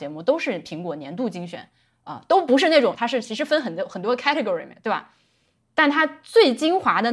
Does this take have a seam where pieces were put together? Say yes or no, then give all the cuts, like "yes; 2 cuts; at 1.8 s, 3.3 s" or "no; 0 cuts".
yes; 1 cut; at 2.9 s